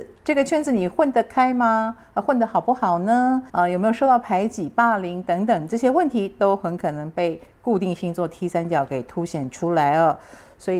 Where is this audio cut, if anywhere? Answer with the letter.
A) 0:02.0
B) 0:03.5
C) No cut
B